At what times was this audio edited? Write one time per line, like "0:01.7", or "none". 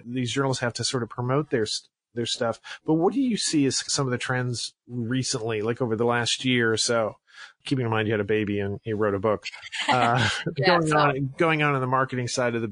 none